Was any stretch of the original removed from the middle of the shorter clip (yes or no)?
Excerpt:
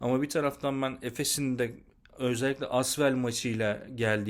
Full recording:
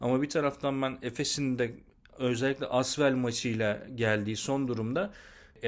no